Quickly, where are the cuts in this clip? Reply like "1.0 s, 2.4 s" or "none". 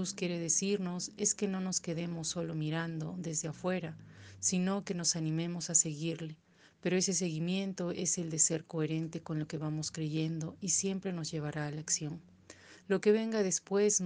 none